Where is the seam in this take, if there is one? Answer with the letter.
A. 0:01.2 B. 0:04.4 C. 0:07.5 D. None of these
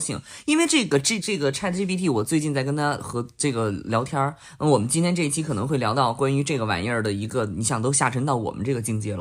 A